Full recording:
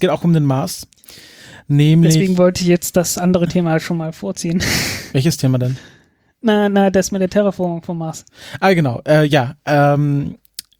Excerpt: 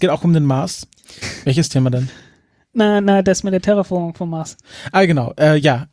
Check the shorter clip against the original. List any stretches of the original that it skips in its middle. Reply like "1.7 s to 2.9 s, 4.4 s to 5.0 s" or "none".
1.2 s to 4.9 s